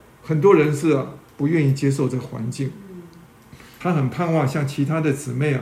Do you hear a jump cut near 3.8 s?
yes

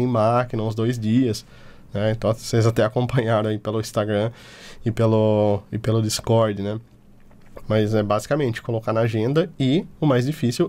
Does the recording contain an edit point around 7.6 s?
yes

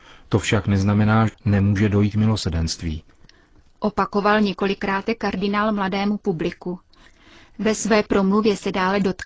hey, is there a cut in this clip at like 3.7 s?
no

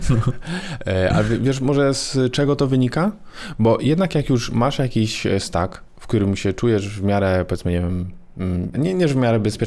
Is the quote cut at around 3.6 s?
no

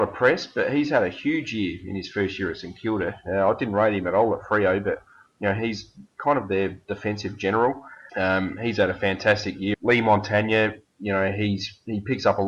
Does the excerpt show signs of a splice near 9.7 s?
yes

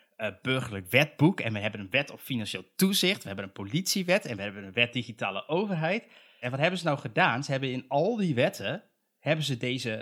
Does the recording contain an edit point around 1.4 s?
no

